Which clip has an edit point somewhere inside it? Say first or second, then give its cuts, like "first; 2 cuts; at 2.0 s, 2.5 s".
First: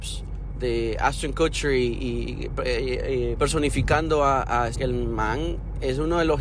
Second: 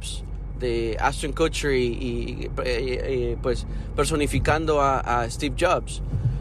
first; 2 cuts; at 3.4 s, 4.7 s